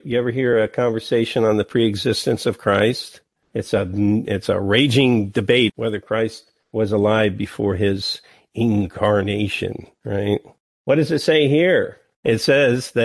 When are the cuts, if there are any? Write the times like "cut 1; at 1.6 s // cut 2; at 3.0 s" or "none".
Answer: cut 1; at 5.7 s